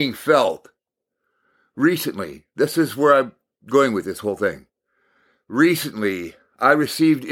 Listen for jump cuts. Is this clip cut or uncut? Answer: uncut